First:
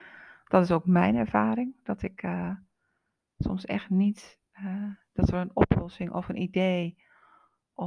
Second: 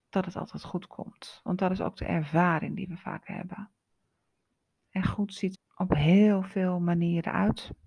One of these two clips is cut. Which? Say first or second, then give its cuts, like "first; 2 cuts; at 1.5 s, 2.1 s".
second; 1 cut; at 5.5 s